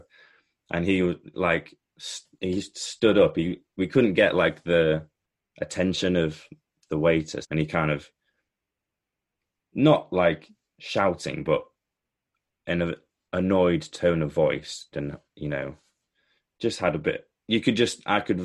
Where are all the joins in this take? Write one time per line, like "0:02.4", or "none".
0:07.4
0:14.9